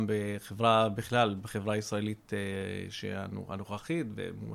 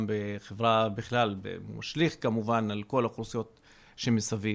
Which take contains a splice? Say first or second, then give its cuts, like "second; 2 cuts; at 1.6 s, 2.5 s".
second; 1 cut; at 1.4 s